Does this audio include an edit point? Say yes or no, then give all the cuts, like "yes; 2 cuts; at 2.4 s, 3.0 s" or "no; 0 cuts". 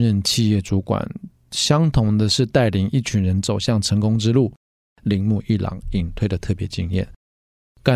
yes; 1 cut; at 5.0 s